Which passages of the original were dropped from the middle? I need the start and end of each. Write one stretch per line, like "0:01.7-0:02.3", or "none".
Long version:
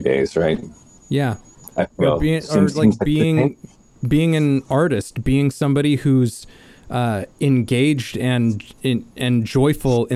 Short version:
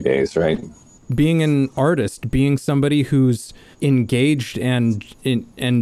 0:01.0-0:03.9
0:06.6-0:07.3